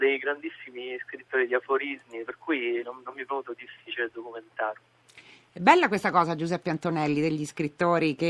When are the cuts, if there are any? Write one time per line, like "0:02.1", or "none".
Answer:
none